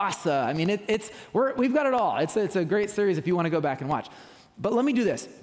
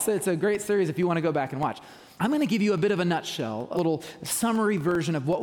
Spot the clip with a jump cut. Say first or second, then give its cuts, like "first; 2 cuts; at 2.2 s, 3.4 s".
second; 2 cuts; at 2.2 s, 3.7 s